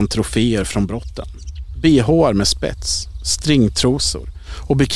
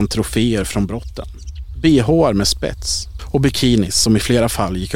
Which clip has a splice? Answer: second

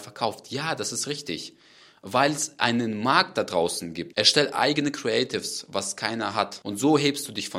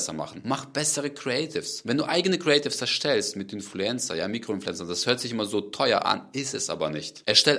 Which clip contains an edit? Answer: first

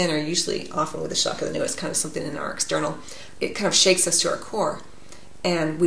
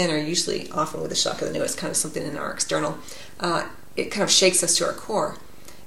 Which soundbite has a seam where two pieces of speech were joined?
first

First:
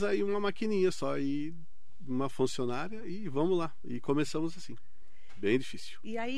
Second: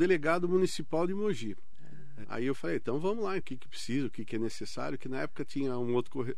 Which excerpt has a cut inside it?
second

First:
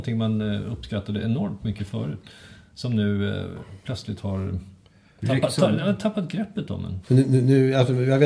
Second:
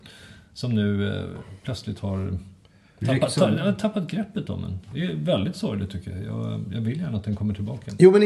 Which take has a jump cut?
first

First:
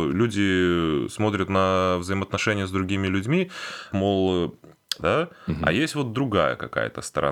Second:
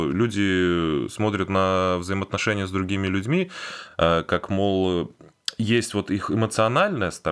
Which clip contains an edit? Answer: first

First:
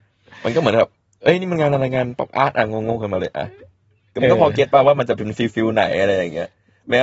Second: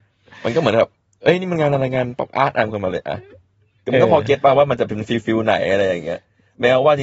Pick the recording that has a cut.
second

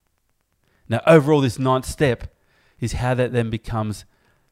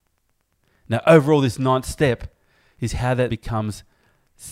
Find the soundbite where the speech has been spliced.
second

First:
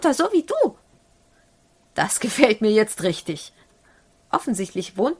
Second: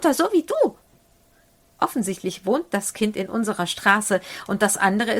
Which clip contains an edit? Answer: second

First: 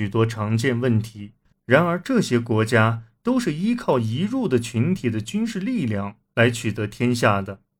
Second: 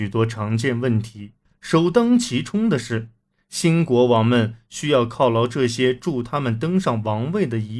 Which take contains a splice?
first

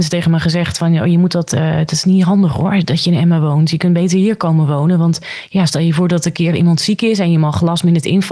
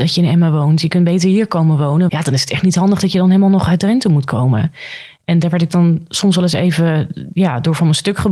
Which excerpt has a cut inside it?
second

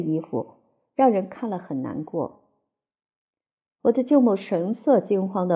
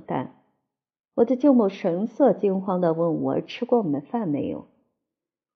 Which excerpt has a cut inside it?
first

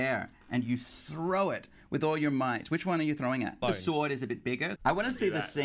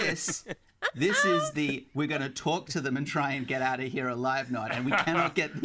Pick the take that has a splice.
first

